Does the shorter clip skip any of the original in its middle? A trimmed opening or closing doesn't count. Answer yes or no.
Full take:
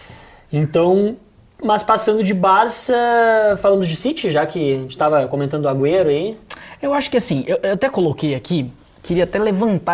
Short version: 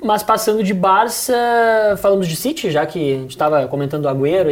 no